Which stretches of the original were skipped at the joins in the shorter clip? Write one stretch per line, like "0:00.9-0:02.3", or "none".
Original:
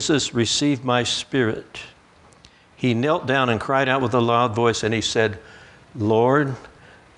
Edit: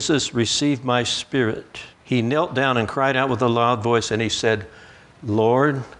0:01.9-0:02.7

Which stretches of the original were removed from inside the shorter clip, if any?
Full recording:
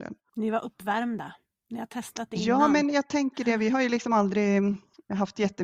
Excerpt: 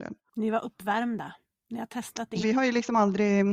0:02.4-0:03.6

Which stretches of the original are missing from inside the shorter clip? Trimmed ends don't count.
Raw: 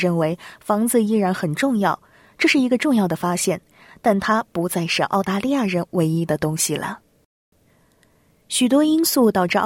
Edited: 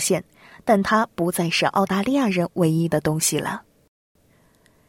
none

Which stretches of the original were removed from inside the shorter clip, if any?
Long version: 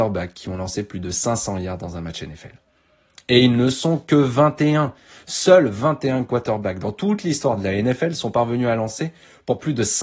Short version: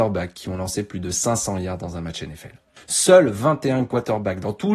0:02.8-0:05.2

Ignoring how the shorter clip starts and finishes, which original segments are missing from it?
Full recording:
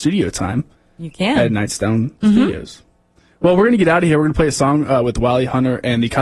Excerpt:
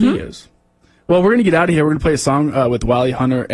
none

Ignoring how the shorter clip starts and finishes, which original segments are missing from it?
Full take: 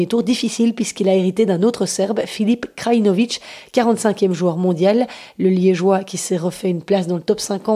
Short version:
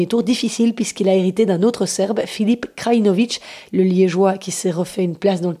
0:03.7-0:05.3

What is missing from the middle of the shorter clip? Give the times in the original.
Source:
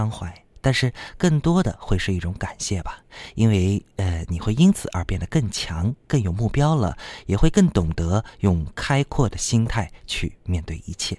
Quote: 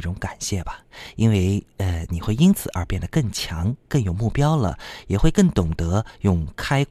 none

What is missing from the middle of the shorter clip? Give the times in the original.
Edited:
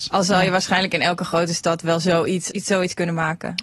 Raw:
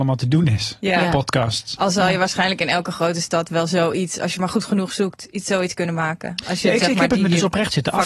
0:04.2-0:05.3

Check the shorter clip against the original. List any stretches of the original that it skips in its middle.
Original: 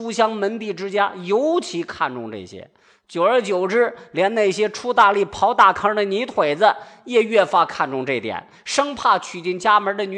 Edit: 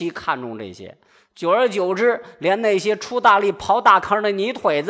none

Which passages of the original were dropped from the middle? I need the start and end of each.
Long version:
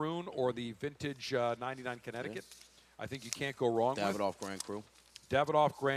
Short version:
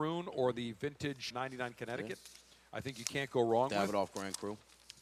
0:01.3-0:01.6

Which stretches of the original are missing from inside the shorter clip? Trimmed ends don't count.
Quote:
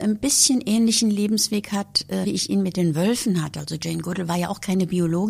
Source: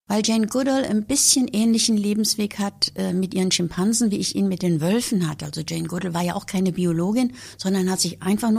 0:03.1-0:04.1

